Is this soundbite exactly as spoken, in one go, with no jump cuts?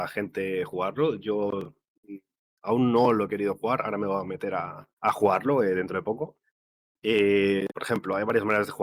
no; 2 cuts; at 4.9 s, 7.7 s

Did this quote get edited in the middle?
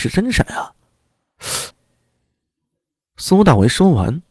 yes; 1 cut; at 1.7 s

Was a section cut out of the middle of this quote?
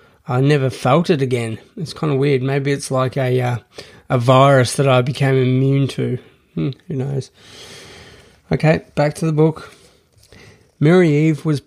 no; 0 cuts

